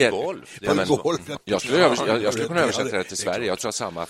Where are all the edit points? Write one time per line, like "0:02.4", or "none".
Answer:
0:01.4